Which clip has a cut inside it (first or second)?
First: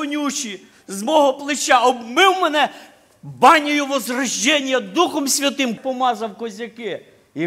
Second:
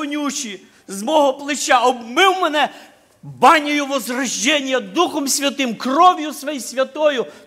first